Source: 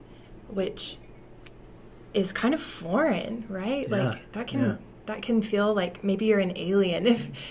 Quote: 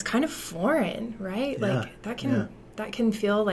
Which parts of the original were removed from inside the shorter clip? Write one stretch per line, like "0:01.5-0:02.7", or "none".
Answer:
none